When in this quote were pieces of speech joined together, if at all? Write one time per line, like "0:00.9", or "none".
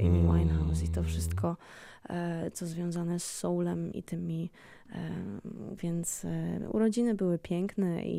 0:03.9
0:05.8